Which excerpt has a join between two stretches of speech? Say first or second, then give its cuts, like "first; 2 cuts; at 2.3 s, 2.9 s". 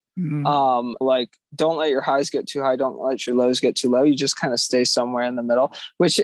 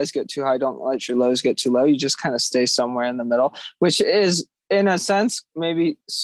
first; 1 cut; at 1.0 s